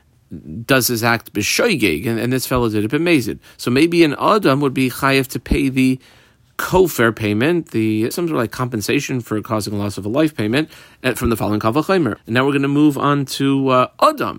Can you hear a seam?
yes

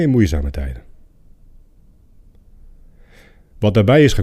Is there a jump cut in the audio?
no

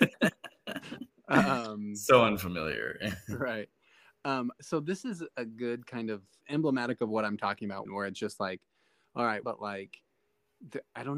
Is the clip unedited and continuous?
no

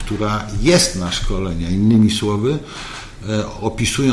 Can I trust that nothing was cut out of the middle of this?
yes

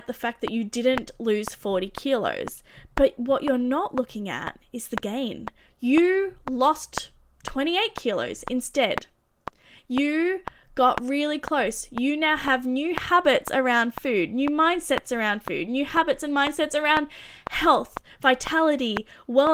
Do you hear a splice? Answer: no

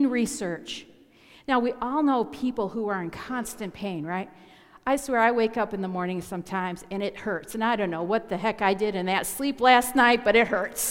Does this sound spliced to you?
no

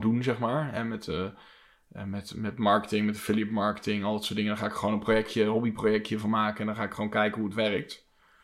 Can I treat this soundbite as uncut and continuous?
yes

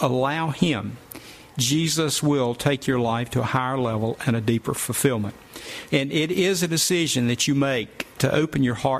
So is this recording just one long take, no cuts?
no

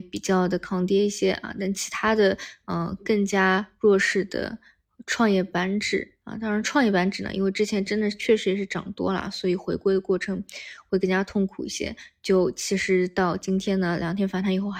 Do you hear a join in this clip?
no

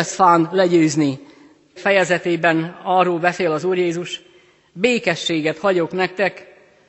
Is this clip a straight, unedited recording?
no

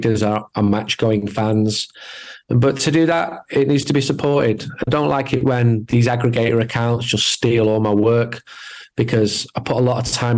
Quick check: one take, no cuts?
yes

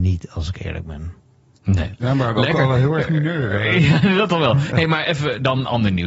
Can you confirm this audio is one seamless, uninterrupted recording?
no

